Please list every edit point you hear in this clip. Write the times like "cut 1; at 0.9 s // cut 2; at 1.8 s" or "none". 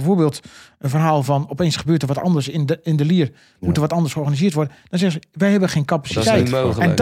none